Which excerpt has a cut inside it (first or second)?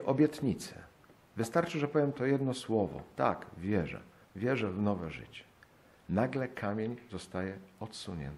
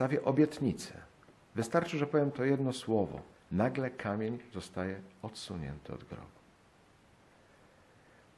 second